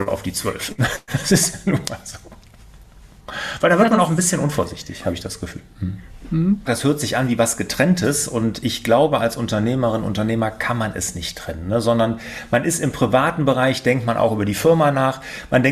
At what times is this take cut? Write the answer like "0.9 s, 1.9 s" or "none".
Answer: 6.7 s